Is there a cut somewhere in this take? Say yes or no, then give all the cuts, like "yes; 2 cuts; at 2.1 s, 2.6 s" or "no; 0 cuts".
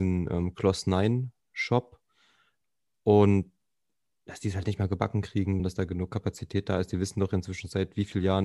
yes; 2 cuts; at 1.4 s, 5.6 s